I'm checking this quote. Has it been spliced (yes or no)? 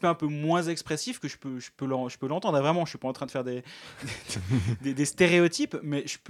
no